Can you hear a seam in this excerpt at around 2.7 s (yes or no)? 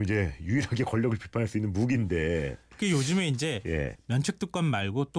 no